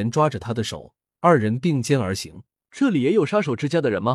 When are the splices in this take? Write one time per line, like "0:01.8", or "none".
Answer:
0:02.6